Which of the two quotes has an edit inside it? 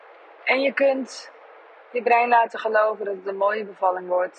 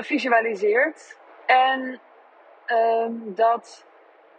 second; 1 cut; at 1.3 s

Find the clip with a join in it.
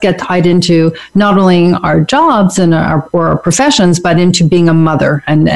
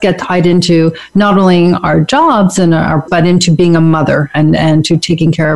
second; 1 cut; at 3.1 s

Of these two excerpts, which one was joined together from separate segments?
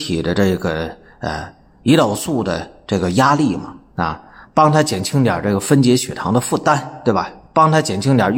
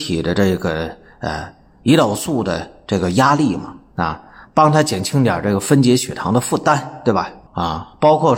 second; 1 cut; at 7.5 s

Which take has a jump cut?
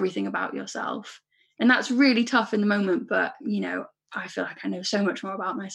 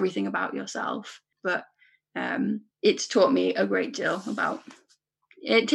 second; 2 cuts; at 1.3 s, 2.7 s

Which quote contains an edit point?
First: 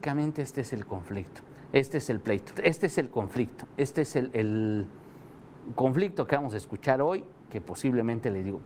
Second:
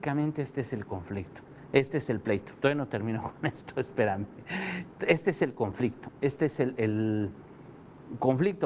first; 1 cut; at 2.6 s

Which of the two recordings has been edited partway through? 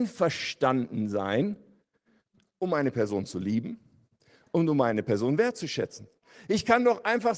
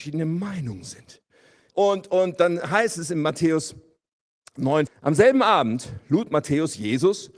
second; 2 cuts; at 1.7 s, 4.9 s

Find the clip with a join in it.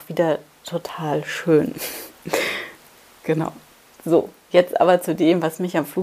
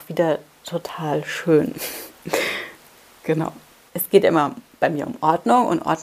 second; 1 cut; at 3.9 s

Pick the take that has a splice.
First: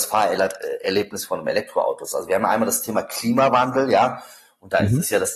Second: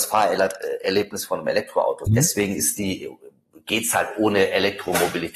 second; 1 cut; at 2.1 s

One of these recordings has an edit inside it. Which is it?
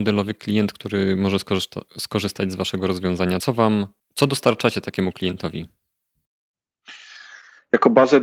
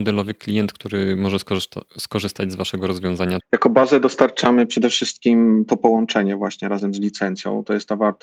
second; 1 cut; at 3.4 s

